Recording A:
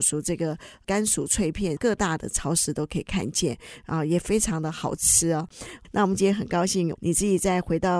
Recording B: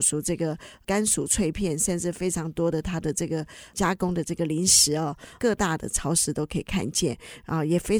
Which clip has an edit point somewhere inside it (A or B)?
A